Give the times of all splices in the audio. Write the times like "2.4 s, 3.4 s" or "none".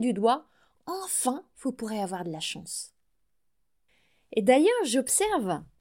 none